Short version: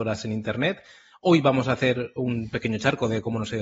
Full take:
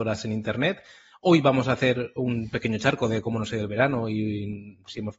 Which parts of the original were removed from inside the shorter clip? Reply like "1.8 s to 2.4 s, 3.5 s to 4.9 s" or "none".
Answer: none